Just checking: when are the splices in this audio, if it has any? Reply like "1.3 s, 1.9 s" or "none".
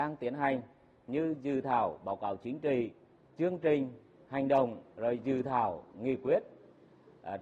3.2 s, 4.9 s